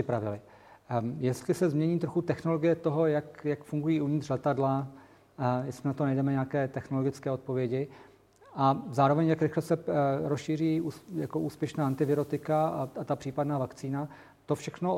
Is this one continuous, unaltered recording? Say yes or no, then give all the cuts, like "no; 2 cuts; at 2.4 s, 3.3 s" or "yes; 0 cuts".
yes; 0 cuts